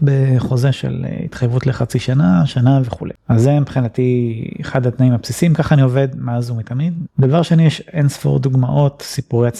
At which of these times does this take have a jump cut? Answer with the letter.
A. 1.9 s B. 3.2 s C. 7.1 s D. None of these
C